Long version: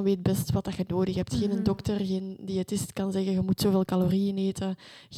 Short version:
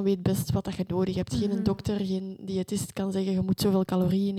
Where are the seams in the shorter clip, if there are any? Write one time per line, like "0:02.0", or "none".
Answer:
none

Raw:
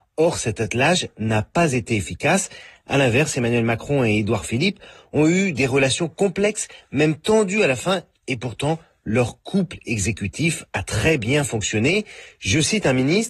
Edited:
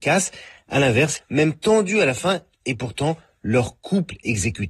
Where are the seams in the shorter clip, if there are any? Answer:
0:01.2

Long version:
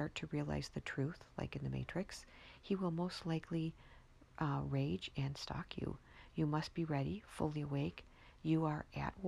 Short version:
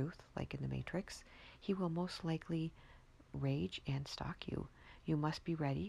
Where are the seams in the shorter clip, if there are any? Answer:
0:03.3

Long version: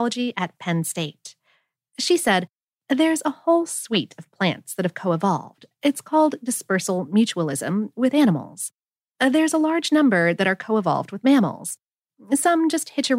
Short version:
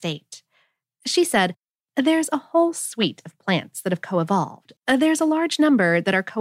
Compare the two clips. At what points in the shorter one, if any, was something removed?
0:04.8

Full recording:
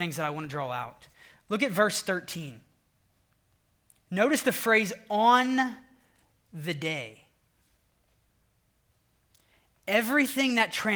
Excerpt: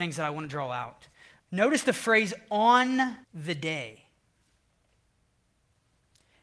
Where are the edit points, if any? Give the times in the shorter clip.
0:01.4
0:03.2

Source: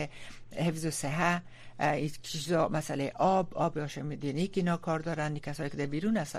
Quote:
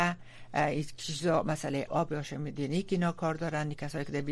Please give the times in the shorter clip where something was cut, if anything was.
0:01.9

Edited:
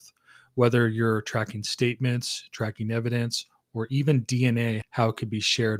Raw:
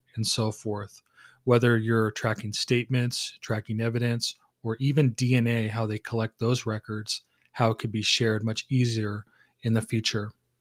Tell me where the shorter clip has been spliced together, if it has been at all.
0:04.8

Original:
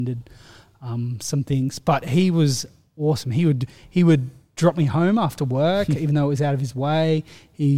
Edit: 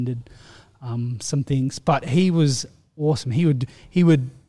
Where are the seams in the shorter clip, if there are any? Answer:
none

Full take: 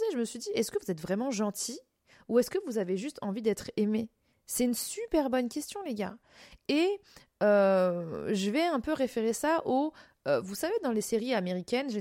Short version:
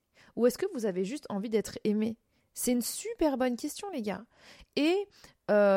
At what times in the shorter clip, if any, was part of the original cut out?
none

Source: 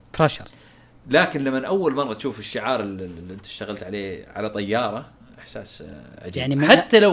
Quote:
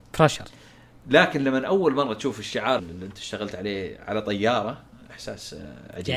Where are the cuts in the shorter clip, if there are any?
0:02.8

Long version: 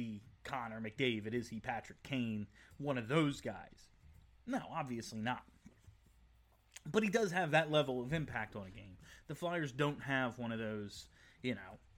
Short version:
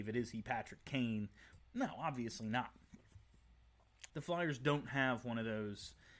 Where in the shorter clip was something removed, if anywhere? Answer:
0:01.6
0:04.1

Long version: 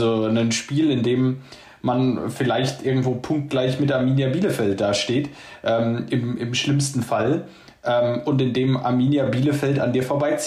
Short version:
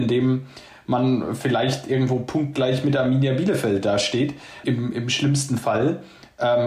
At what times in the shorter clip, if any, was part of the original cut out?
0:04.6

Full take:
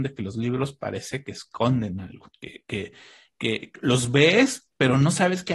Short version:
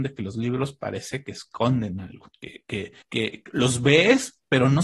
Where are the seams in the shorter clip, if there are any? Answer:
0:03.0

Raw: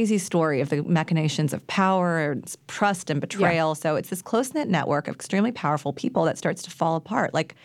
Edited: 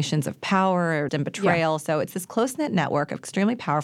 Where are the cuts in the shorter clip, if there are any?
0:01.1

